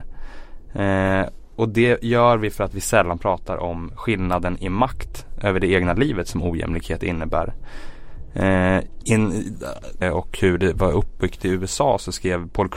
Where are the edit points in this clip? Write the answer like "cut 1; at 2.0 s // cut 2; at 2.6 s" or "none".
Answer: cut 1; at 10.0 s